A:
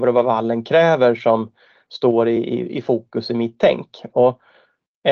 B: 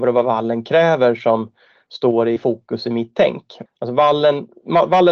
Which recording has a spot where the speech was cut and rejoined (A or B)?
B